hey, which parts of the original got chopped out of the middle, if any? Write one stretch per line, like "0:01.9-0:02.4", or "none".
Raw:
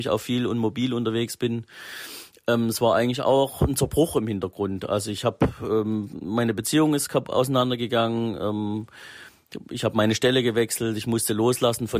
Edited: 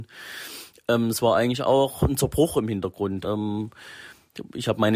0:04.8-0:08.4